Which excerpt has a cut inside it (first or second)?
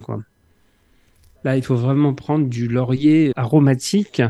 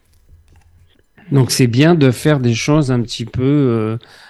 first